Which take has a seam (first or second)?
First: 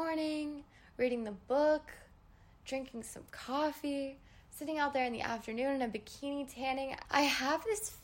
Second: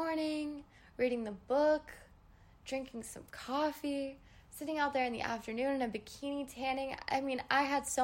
first